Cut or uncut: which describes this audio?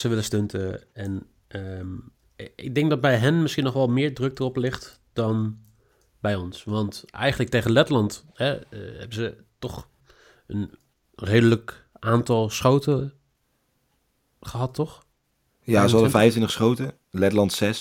uncut